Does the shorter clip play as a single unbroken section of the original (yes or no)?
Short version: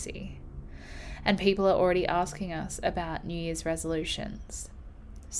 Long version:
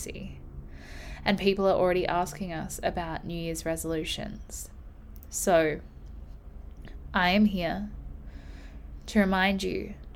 yes